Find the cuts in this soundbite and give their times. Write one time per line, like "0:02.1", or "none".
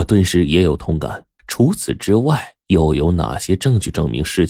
0:01.4
0:02.6